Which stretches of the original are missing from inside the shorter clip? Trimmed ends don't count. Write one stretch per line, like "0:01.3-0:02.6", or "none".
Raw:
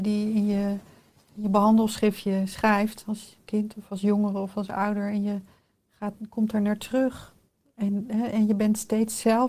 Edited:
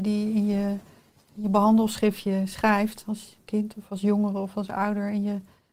none